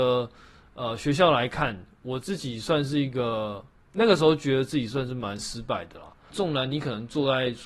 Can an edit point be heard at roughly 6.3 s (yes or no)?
yes